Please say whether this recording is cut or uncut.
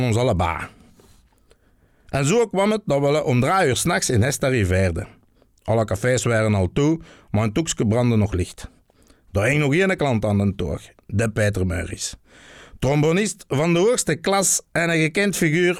uncut